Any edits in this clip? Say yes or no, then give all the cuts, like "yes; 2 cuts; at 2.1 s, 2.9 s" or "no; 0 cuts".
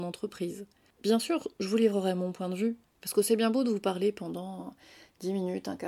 yes; 1 cut; at 2.9 s